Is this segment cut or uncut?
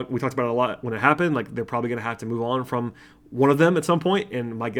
uncut